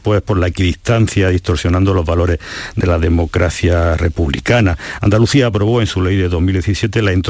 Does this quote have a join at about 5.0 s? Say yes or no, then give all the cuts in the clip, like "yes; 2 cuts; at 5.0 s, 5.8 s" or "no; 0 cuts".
no; 0 cuts